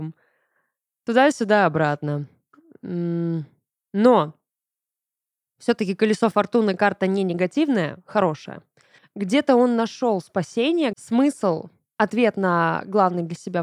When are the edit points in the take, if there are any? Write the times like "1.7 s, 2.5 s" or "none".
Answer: 9.0 s, 10.9 s